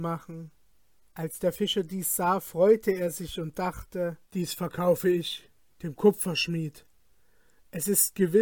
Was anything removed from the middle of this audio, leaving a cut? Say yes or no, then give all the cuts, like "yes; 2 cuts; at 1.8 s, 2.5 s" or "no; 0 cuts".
yes; 2 cuts; at 1.0 s, 4.2 s